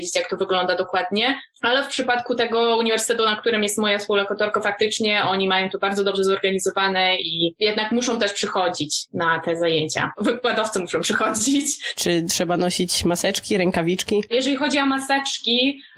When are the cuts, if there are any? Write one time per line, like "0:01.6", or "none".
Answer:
0:11.9

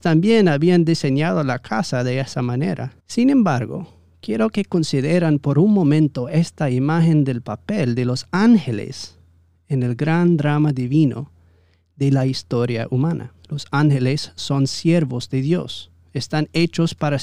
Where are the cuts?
0:03.0
0:13.4

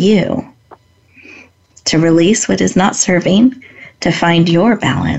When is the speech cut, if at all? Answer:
none

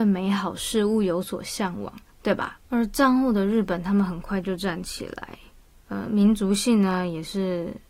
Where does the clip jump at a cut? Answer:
0:02.6

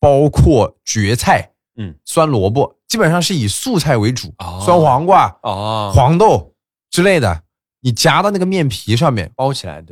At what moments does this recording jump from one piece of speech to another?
none

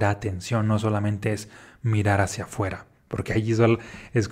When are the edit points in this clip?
none

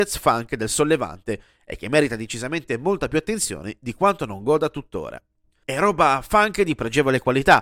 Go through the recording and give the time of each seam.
0:05.6

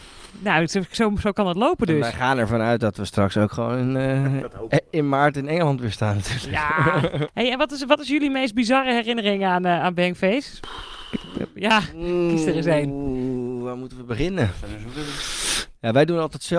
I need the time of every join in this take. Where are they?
none

